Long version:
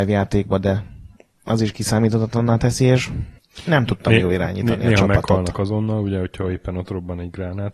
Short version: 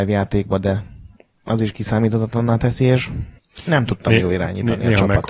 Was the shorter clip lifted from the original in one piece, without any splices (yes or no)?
yes